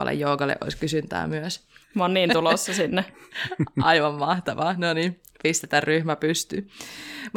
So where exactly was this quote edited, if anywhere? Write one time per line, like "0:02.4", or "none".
0:01.8